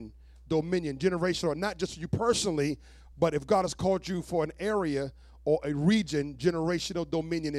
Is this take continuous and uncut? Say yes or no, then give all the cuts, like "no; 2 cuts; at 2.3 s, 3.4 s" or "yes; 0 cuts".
yes; 0 cuts